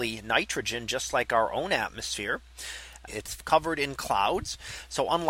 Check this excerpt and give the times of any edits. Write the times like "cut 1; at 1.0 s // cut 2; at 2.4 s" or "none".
cut 1; at 3.1 s